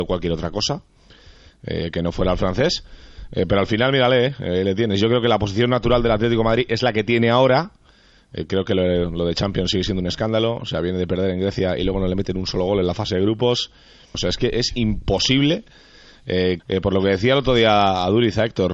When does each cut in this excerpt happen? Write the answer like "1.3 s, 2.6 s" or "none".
14.1 s, 16.6 s